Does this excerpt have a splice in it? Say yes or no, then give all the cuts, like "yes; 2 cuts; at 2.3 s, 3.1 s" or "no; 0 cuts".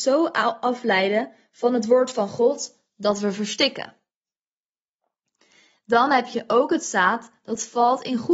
no; 0 cuts